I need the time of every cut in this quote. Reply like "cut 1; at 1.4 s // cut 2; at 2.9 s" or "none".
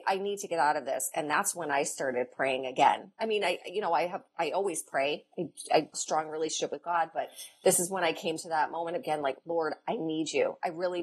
cut 1; at 5.9 s